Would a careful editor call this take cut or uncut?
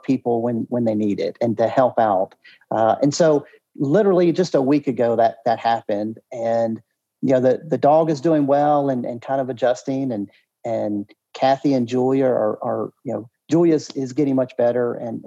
uncut